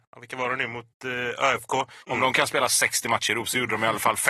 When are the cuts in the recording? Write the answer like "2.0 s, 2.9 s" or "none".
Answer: 2.0 s